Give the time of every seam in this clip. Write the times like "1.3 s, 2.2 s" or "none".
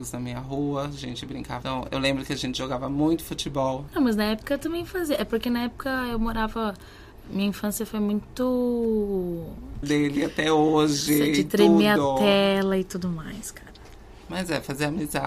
1.6 s, 3.9 s, 9.8 s

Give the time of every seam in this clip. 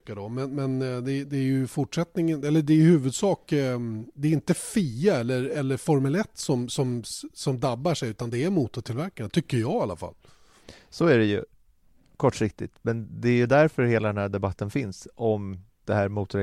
none

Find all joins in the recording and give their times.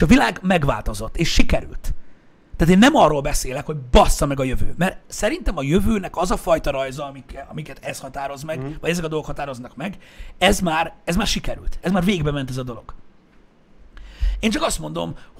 none

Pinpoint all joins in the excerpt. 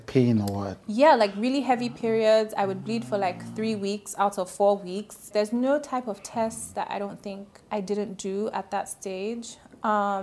5.3 s

